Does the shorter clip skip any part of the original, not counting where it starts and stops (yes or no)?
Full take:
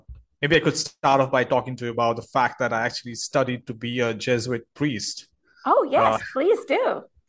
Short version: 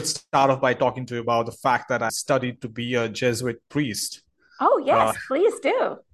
yes